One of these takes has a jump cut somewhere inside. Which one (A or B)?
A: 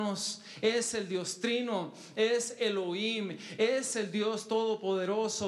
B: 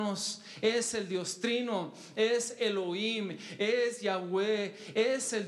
A